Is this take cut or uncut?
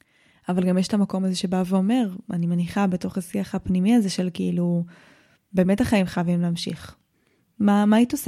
uncut